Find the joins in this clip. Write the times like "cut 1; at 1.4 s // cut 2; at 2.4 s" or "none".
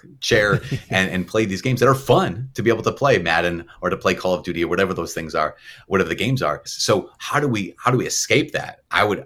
cut 1; at 6.7 s